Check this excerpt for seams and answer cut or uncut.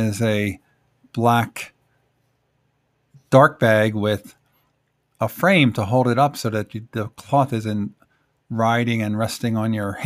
uncut